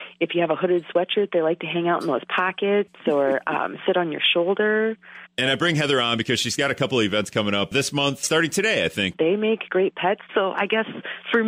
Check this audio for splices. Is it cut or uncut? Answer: cut